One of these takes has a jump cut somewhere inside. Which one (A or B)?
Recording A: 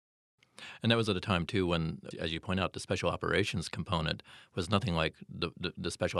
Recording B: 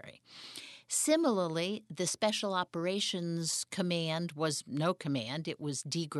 A